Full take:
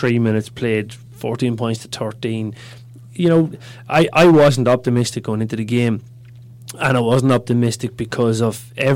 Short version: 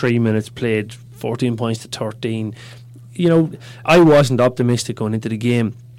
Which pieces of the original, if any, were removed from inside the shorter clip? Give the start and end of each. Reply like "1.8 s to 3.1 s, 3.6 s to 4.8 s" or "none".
3.8 s to 4.1 s